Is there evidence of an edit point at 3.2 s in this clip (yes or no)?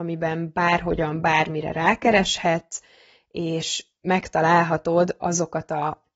no